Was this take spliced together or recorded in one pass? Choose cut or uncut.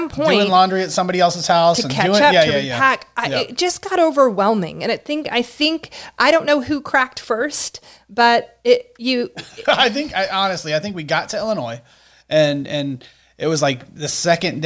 uncut